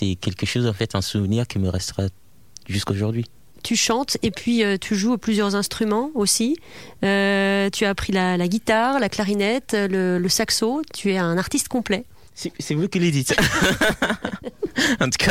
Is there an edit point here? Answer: no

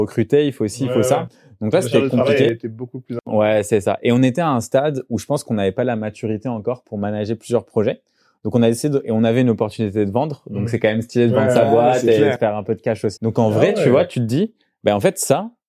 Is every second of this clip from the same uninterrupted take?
no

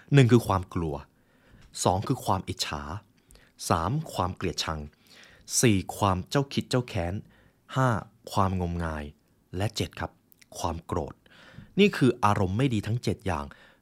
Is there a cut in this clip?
yes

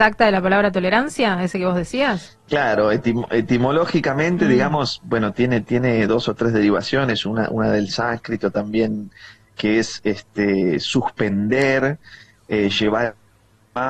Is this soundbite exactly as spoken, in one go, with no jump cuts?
yes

